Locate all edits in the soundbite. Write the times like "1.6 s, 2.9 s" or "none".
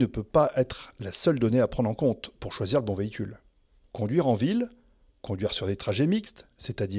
3.9 s

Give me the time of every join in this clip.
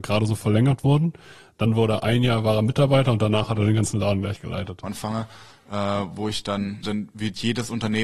4.8 s, 6.8 s

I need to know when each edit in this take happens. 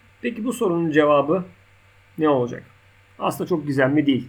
none

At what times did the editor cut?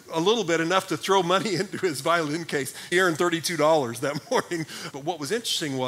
2.9 s, 4.9 s

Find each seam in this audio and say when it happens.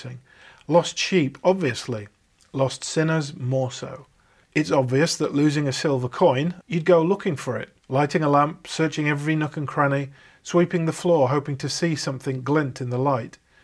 4.4 s, 6.6 s, 7.8 s

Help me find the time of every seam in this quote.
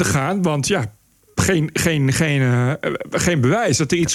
none

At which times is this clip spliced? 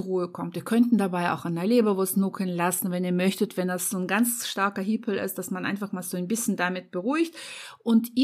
none

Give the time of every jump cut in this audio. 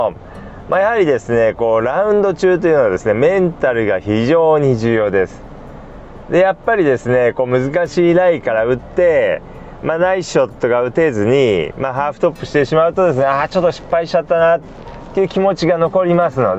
none

